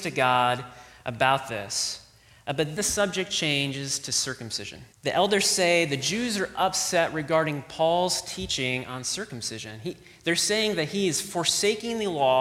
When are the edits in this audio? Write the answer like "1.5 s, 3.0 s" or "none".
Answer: 2.8 s, 4.9 s